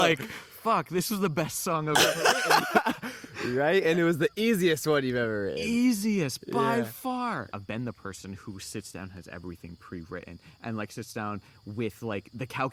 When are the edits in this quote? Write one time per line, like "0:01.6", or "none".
0:07.5